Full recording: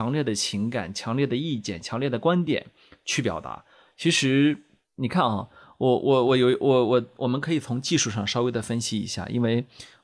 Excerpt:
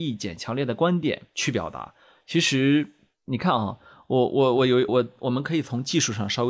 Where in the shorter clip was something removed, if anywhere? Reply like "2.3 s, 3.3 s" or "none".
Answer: 1.3 s, 4.9 s